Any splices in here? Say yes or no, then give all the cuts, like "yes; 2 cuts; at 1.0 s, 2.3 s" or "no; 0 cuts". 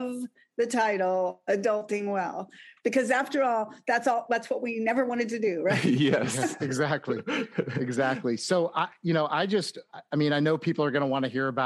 no; 0 cuts